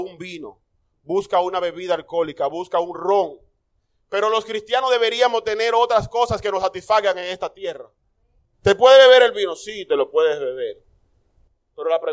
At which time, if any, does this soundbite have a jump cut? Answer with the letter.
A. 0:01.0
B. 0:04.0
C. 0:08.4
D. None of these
C